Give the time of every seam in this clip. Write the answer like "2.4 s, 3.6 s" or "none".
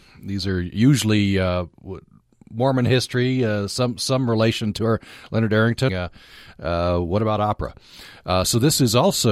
5.9 s